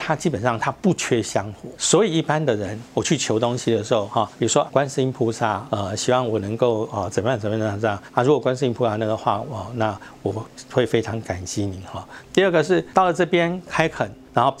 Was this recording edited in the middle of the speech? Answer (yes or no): yes